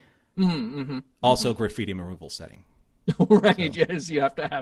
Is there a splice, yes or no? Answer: no